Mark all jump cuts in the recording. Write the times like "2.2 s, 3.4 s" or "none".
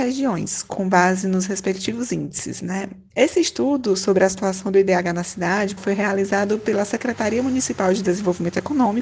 3.1 s, 5.8 s